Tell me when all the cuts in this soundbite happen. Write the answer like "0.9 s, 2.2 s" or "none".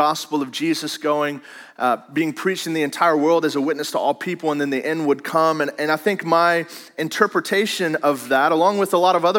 none

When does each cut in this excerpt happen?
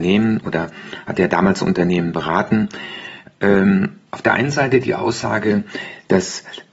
4.1 s

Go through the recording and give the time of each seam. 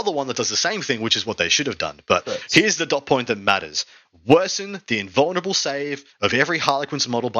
none

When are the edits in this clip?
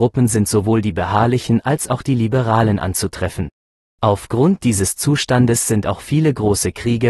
3.8 s

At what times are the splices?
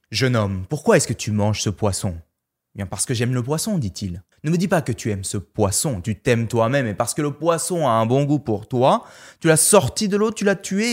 4.3 s

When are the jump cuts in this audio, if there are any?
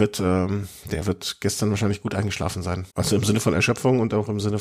2.9 s

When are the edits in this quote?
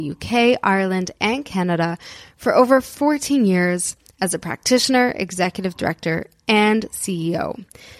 none

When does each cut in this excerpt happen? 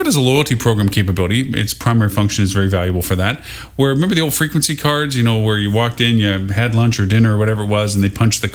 none

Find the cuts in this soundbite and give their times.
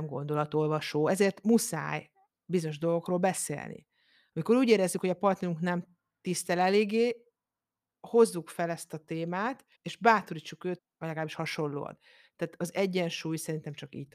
9.7 s, 10.8 s

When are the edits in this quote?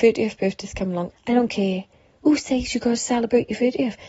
1.1 s

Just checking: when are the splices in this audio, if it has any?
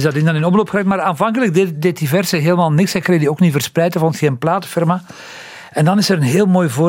none

